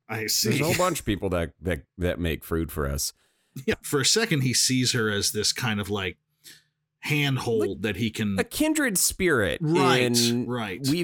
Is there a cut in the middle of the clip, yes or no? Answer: yes